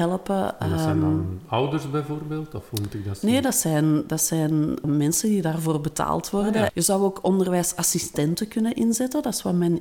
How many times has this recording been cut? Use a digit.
2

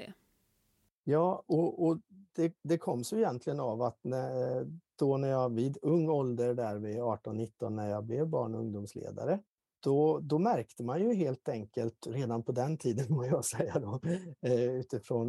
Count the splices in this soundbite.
0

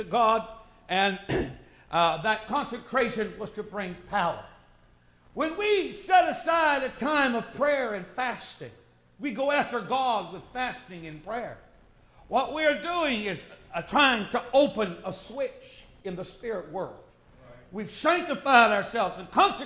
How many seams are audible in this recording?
0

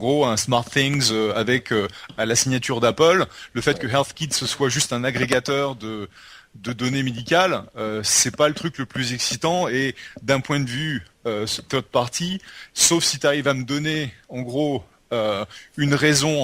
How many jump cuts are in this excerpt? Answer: 0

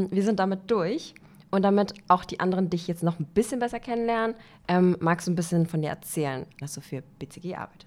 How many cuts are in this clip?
1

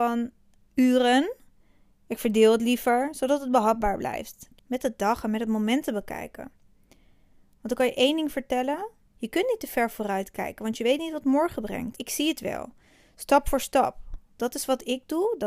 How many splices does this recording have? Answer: 3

